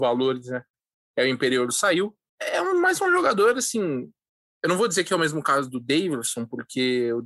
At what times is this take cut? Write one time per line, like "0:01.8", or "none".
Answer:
0:02.3